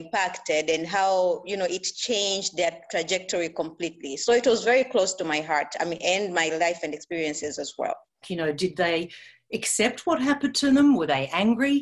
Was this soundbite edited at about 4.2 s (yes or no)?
no